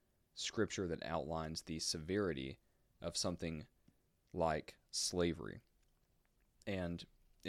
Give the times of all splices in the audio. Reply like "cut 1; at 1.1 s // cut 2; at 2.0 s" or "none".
none